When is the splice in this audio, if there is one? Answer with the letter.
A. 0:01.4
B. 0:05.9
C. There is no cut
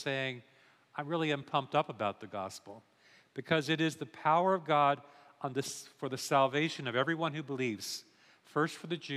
A